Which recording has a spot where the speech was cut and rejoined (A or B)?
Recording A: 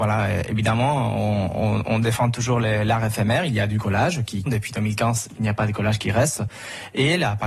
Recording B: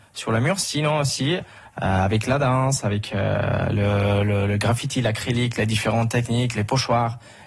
A